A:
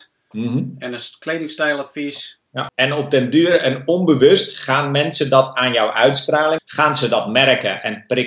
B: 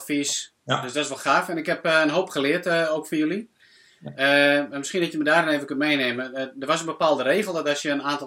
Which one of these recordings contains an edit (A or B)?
A